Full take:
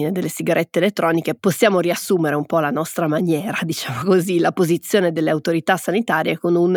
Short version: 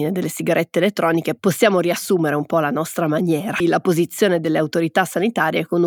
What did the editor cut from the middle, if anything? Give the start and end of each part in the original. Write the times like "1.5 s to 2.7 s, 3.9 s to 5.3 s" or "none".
3.6 s to 4.3 s